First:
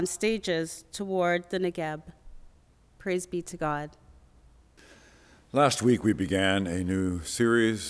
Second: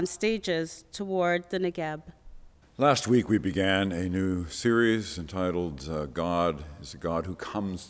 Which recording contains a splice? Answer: second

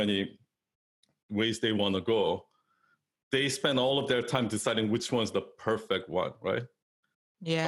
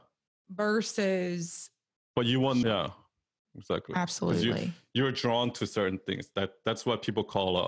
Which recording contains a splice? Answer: second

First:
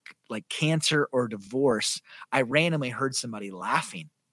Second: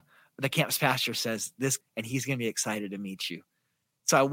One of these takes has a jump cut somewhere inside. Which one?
second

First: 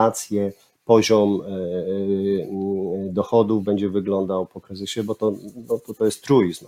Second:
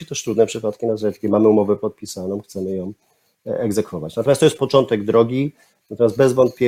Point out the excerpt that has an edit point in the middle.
second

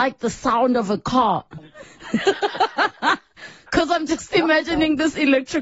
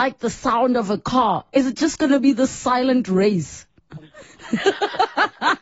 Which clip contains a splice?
first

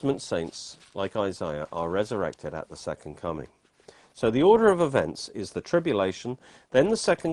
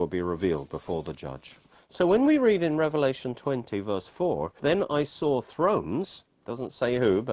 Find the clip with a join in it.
second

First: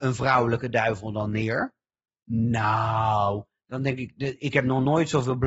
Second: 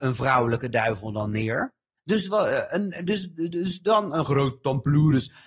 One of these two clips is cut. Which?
second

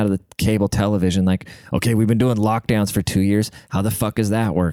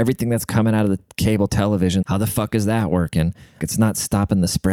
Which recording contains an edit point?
second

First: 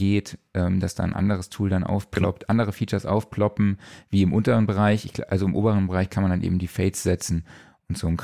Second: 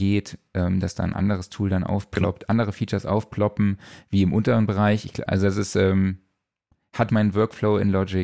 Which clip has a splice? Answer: second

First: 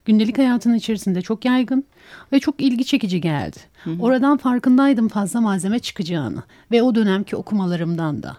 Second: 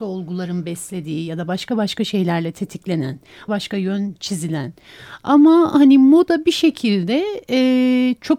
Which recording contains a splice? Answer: second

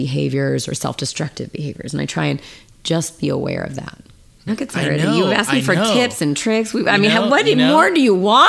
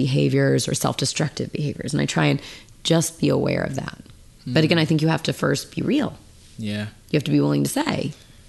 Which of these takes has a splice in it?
first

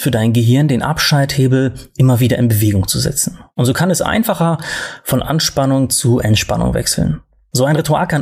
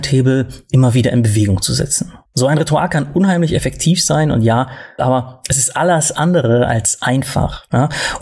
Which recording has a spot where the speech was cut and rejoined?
second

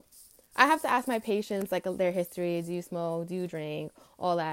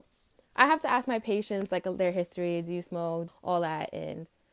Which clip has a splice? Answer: second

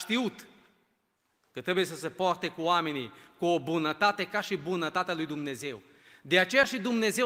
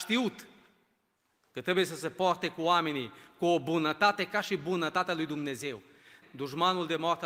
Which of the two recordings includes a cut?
second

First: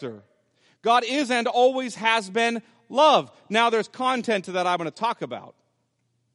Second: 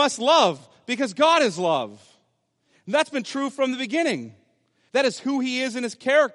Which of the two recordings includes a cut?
second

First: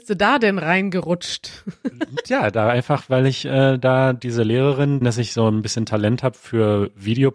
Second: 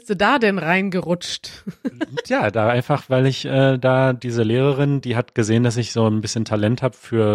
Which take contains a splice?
first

